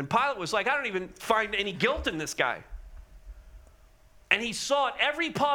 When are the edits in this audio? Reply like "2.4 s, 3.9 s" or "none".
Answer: none